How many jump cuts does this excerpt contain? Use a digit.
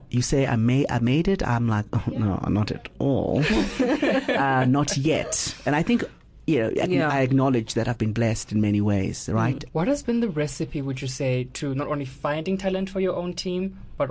1